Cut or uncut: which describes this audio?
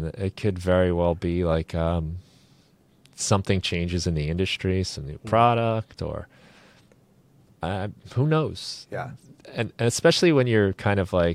uncut